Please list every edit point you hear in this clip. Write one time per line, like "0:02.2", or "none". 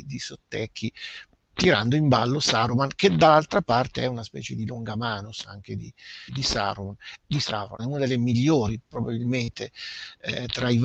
0:06.3
0:07.8

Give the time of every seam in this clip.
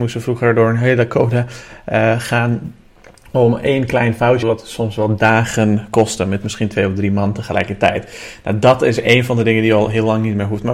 0:04.4

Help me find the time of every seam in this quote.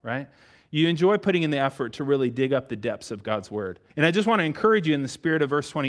0:03.9

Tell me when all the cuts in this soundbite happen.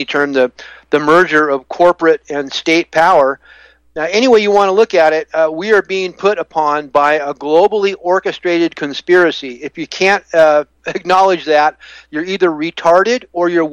none

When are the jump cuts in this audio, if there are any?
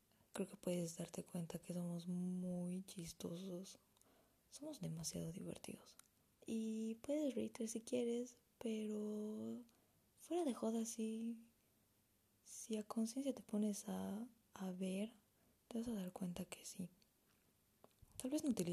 0:06.3
0:15.5

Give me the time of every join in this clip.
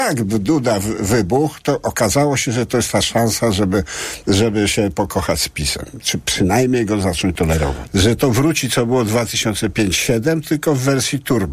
0:07.9

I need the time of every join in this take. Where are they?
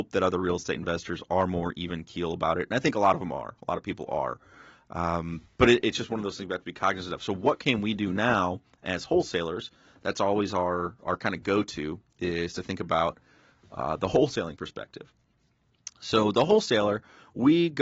none

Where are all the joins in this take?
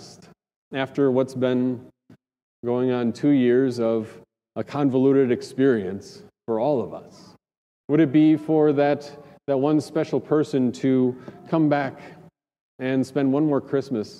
0:07.8

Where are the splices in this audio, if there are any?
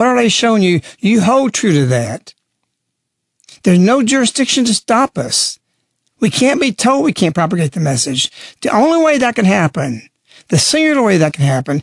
none

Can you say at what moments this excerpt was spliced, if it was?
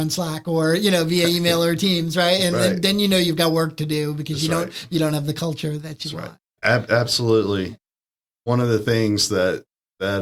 0:06.6

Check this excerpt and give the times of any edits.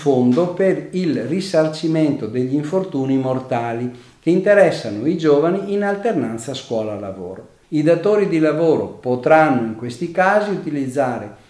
0:07.6

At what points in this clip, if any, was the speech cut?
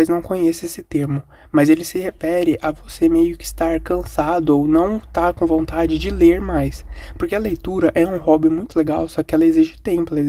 none

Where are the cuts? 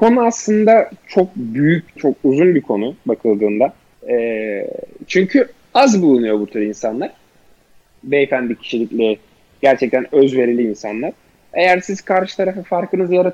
0:02.0
0:03.9

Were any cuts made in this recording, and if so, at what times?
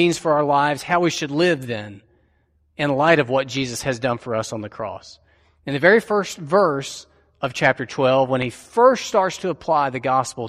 none

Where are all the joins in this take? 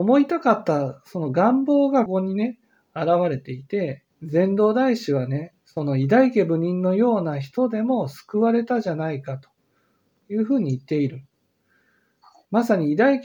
0:02.1
0:04.1
0:05.6

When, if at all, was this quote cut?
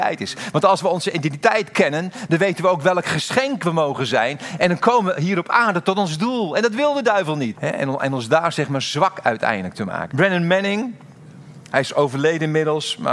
0:07.6
0:10.1

